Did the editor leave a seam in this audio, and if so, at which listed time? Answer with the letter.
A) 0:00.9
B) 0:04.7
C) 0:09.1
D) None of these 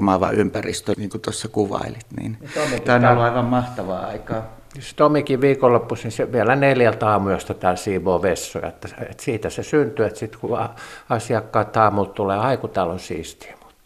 A